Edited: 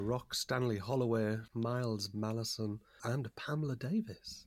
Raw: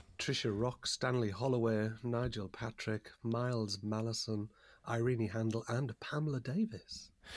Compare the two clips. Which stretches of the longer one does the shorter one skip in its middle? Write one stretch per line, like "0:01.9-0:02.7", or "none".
0:02.0-0:03.2
0:04.7-0:05.6